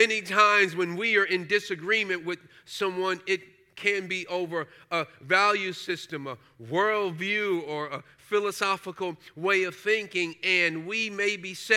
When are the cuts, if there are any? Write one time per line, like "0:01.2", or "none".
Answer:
none

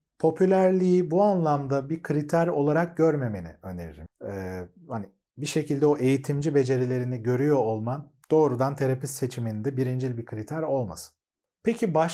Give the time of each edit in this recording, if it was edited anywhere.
0:04.1
0:08.2

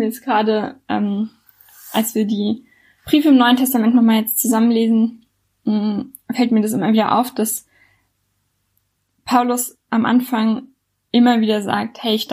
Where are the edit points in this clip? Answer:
none

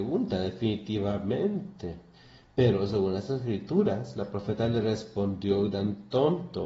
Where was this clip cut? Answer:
none

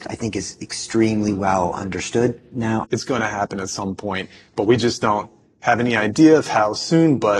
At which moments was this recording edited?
0:02.8

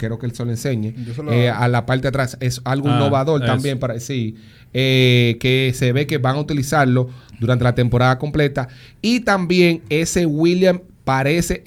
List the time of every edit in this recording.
none

